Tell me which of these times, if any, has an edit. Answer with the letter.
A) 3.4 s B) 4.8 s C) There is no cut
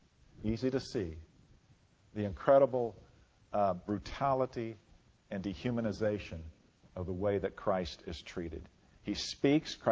C